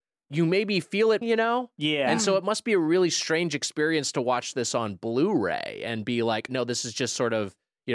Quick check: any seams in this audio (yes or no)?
yes